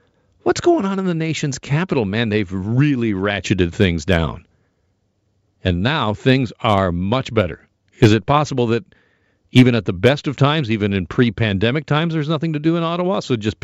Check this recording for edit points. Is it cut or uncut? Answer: cut